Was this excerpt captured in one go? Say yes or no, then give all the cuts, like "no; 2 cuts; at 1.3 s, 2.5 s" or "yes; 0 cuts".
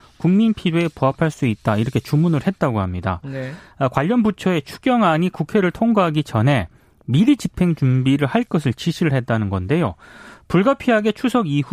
yes; 0 cuts